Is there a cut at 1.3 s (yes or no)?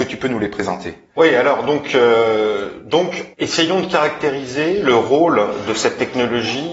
no